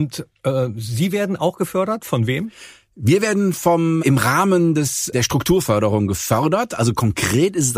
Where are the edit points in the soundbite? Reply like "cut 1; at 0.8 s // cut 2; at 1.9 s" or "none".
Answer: cut 1; at 4.0 s // cut 2; at 5.1 s

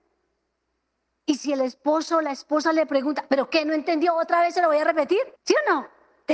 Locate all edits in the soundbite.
cut 1; at 5.4 s

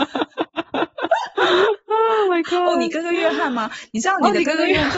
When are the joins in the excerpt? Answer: none

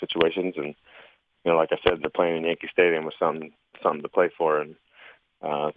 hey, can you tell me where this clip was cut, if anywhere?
none

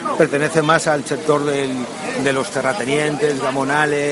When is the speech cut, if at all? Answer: none

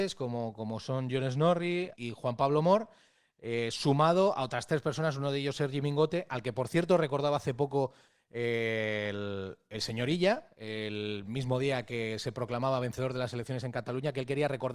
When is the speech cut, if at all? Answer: cut 1; at 1.9 s

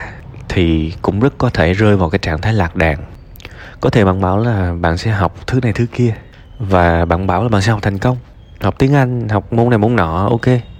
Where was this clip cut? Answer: none

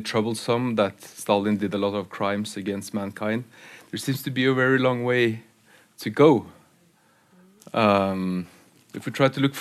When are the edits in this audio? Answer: none

